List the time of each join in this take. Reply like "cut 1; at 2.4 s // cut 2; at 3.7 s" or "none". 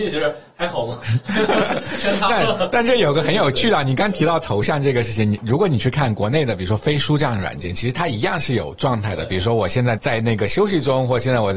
cut 1; at 10.0 s